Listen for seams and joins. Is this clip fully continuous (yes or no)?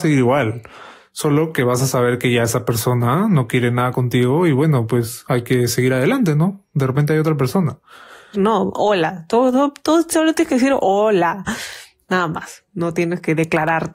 no